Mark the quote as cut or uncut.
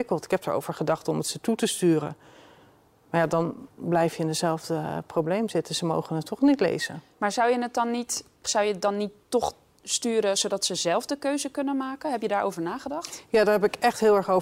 cut